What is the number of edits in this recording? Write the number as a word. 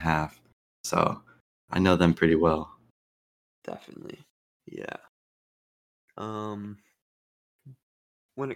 zero